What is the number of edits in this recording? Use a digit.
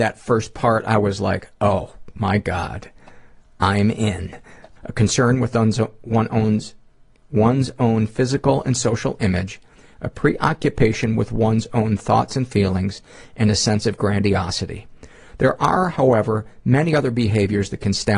1